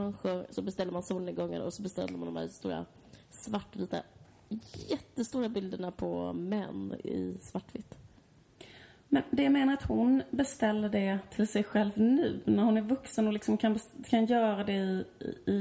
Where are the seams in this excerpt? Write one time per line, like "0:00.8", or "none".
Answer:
none

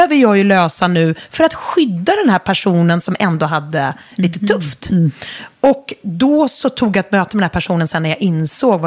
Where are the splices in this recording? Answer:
none

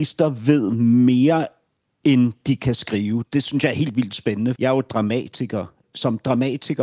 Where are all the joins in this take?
0:04.6
0:05.8

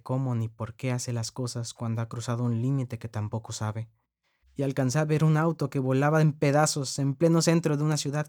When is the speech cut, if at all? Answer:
0:04.4

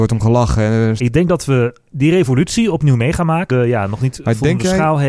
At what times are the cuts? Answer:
0:01.0
0:03.5

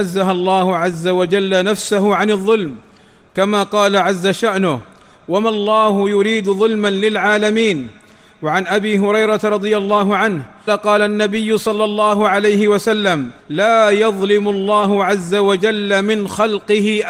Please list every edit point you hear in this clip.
0:10.7
0:13.4

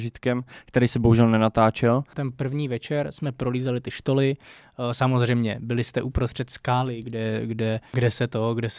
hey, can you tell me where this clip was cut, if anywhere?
none

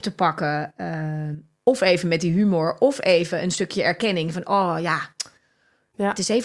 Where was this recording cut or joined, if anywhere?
none

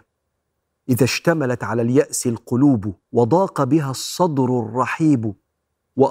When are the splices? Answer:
0:03.0

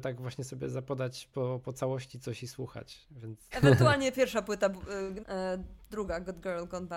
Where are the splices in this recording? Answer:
0:03.5
0:05.2

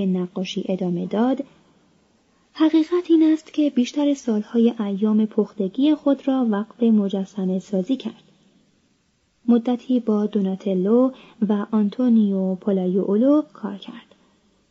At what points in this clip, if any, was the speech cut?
none

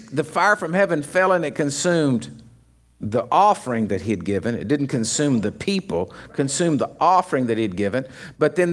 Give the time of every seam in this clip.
none

